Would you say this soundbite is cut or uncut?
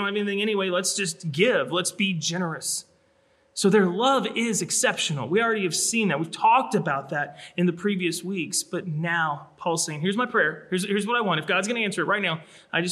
uncut